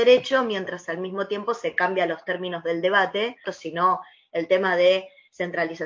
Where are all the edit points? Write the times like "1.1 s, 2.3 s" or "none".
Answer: 3.4 s